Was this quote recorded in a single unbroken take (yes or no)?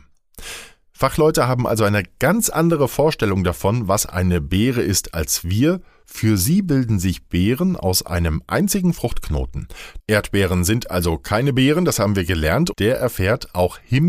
no